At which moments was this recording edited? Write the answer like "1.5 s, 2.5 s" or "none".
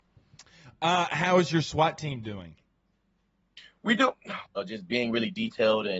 4.5 s